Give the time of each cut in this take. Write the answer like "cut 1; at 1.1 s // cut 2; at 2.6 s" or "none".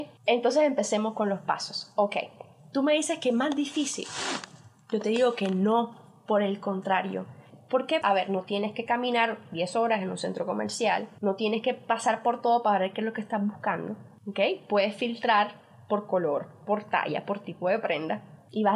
cut 1; at 8.0 s